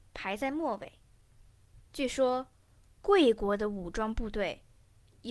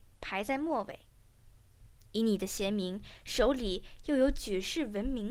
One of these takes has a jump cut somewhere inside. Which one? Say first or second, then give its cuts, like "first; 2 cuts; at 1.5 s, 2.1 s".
first; 1 cut; at 1.9 s